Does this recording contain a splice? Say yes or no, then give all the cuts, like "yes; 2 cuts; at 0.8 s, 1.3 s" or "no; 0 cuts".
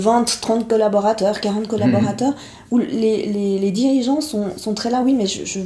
no; 0 cuts